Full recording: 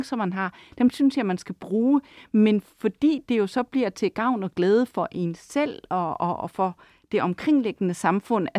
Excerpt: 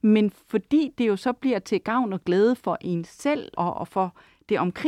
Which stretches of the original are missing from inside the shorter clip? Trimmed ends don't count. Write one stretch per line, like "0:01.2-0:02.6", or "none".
0:05.9-0:06.2